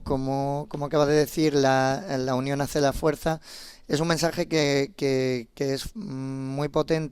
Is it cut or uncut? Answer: uncut